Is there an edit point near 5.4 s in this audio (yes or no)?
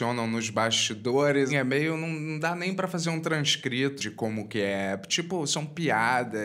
no